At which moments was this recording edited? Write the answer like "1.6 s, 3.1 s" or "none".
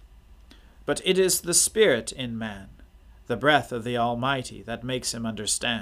none